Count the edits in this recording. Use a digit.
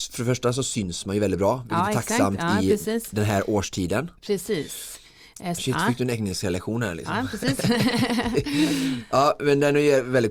1